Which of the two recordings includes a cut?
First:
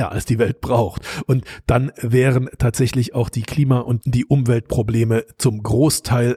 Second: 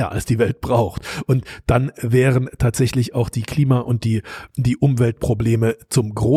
first; 1 cut; at 4.0 s

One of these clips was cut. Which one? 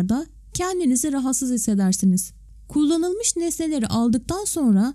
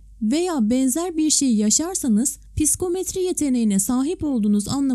first; 1 cut; at 2.6 s

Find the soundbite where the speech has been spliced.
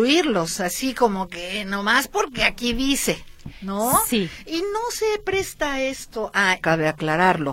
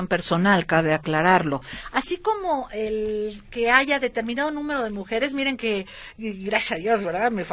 first; 1 cut; at 6.6 s

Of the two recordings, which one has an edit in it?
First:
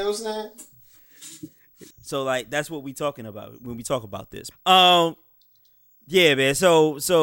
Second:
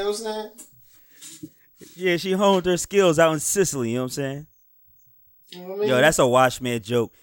first; 2 cuts; at 1.9 s, 4.5 s

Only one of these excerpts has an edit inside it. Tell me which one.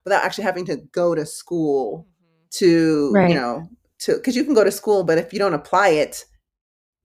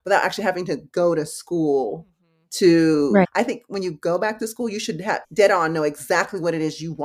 second; 2 cuts; at 3.2 s, 5.2 s

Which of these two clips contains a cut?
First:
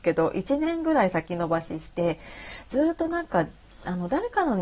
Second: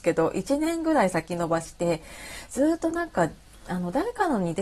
second; 1 cut; at 1.6 s

